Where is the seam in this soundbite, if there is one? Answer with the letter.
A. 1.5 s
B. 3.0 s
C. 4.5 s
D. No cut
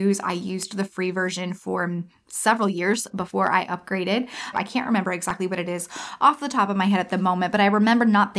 C